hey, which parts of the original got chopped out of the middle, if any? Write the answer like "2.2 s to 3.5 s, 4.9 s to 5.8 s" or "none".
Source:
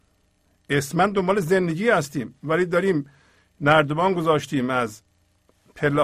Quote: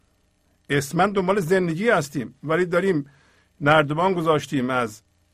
none

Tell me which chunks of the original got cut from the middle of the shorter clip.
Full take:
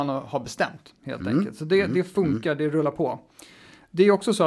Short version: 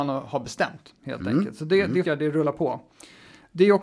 2.0 s to 2.4 s

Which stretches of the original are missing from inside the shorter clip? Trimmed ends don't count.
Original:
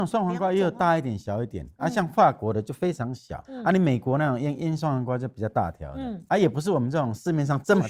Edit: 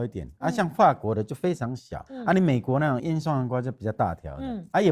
4.4 s to 4.6 s

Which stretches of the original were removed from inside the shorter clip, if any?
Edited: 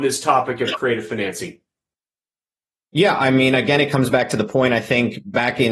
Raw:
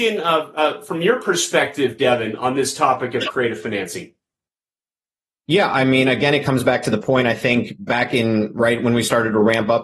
none

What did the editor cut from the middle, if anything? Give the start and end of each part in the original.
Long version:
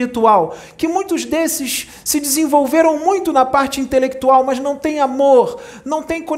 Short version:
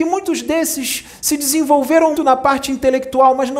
3.0 s to 3.3 s

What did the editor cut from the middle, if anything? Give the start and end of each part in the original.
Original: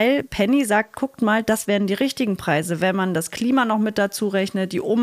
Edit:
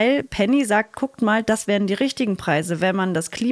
none

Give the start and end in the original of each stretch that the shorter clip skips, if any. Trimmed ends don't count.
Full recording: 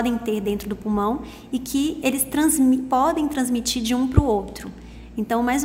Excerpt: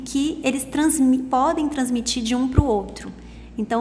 none

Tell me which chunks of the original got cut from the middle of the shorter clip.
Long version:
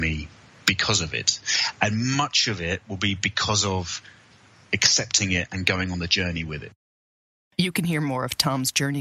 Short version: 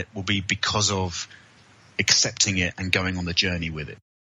none

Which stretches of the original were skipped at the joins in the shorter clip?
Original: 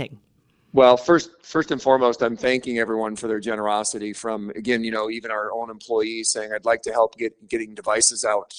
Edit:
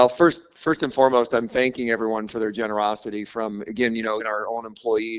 5.1 s to 5.2 s

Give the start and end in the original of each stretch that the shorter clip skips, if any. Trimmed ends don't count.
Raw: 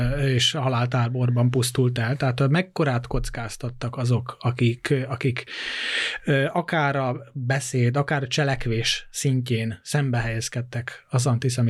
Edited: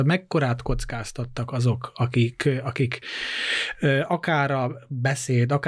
none

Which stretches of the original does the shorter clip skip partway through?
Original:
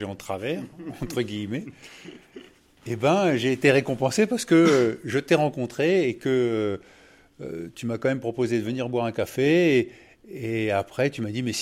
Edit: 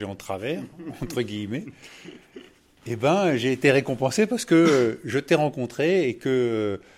none

